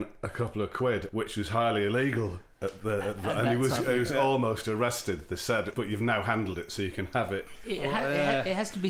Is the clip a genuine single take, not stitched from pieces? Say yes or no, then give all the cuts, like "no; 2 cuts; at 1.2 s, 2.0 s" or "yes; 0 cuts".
yes; 0 cuts